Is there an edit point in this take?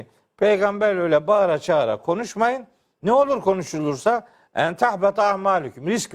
no; 0 cuts

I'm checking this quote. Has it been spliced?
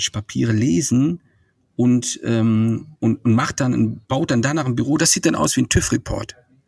yes; 2 cuts; at 2.9 s, 4.0 s

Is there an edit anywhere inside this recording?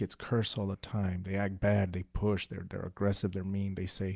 no; 0 cuts

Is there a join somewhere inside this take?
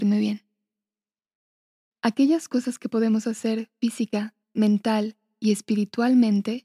yes; 2 cuts; at 1.9 s, 4.4 s

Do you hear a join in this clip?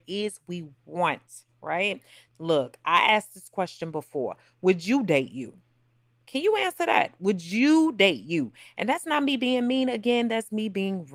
yes; 1 cut; at 2.3 s

